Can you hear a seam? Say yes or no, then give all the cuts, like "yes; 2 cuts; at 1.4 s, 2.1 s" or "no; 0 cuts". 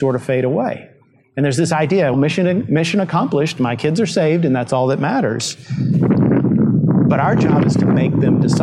yes; 1 cut; at 2.1 s